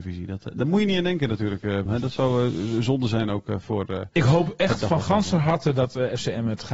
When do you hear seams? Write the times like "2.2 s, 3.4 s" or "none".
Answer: 1.9 s